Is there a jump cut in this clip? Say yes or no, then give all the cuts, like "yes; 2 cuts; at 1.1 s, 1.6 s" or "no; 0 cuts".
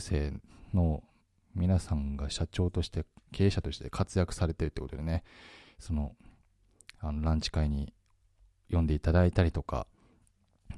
no; 0 cuts